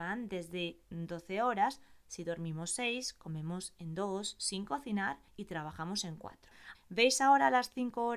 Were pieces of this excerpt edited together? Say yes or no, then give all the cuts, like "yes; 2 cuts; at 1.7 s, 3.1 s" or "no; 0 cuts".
yes; 1 cut; at 6.7 s